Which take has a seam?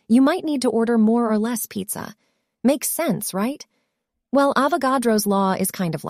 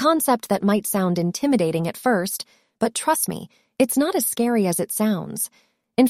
first; 1 cut; at 2.5 s

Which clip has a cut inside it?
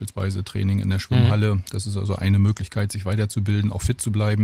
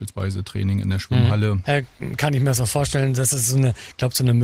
second; 1 cut; at 1.6 s

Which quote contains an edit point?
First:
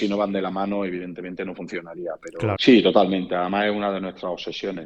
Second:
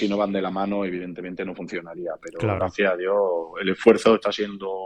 first; 1 cut; at 2.6 s

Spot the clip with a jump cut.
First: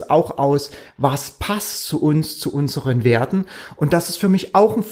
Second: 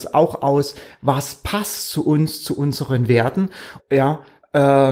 second; 1 cut; at 3.8 s

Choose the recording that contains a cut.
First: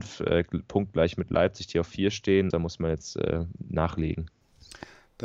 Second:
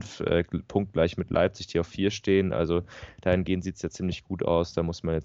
first; 1 cut; at 2.5 s

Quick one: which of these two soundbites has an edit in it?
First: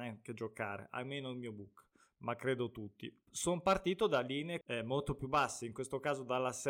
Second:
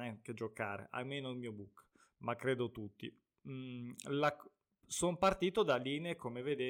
first; 2 cuts; at 3.2 s, 4.6 s

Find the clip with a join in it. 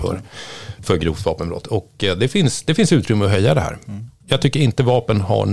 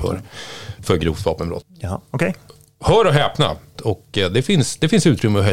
second; 2 cuts; at 1.6 s, 3.8 s

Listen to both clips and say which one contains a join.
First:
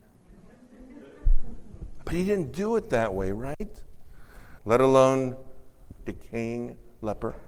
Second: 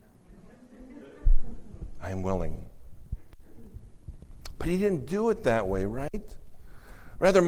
first; 3 cuts; at 2.0 s, 4.6 s, 6.0 s

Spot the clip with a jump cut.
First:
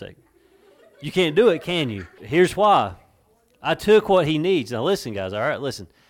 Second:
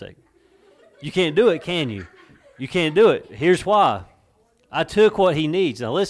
first; 1 cut; at 2.2 s

